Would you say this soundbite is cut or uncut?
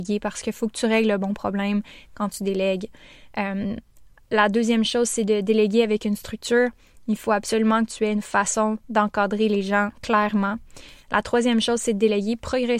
uncut